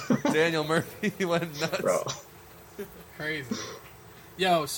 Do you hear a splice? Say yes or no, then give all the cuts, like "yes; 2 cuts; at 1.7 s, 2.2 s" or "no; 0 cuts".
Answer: no; 0 cuts